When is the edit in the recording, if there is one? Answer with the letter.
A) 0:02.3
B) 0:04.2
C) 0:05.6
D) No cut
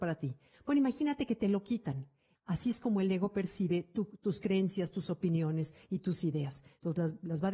A